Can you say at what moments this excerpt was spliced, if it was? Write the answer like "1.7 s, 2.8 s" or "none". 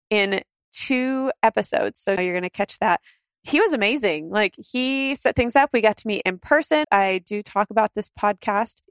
2.2 s, 6.8 s